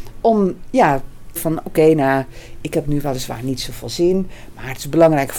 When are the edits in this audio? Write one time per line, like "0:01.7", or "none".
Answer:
0:01.4